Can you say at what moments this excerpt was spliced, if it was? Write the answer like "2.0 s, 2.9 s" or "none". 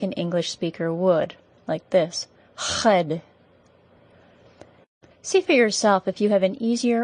5.1 s